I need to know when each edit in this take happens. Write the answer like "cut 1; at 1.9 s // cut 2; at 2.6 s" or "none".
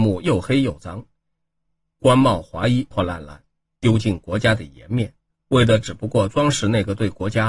cut 1; at 2.9 s